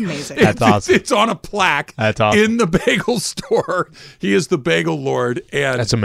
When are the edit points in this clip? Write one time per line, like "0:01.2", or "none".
none